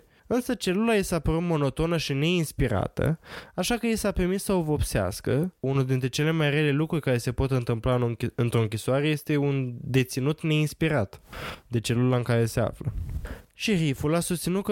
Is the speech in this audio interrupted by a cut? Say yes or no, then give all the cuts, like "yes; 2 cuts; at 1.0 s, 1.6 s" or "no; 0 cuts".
yes; 1 cut; at 5.6 s